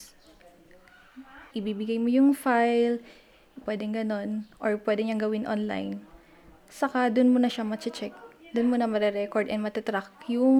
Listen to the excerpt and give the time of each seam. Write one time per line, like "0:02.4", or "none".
0:01.5
0:03.6